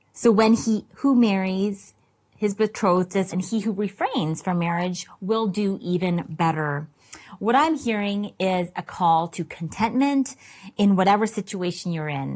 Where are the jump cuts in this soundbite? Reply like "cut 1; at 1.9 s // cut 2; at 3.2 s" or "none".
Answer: cut 1; at 3.3 s